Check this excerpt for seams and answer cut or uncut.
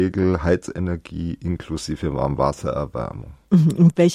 uncut